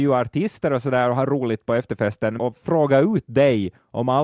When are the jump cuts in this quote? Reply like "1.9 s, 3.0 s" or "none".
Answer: 2.4 s